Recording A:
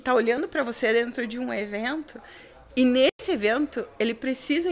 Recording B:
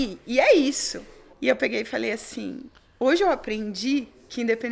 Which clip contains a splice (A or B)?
B